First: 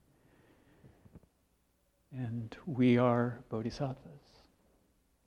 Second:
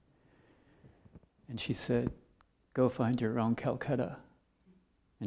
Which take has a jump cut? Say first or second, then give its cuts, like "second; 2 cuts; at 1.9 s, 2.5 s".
second; 1 cut; at 1.4 s